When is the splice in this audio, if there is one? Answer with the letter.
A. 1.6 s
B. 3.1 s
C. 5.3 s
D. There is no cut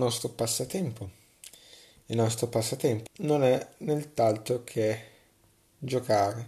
B